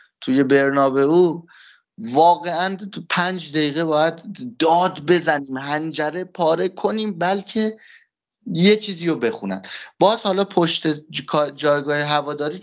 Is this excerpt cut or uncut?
uncut